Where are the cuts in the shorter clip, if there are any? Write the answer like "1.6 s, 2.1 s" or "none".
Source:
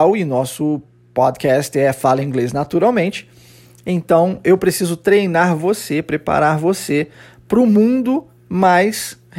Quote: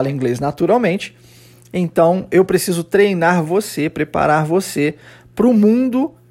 none